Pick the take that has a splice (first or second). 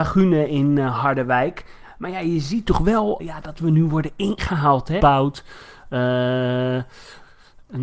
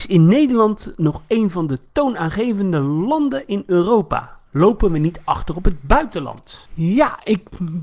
first